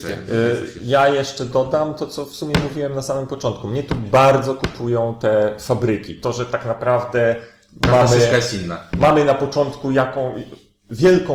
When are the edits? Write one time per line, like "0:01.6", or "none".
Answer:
none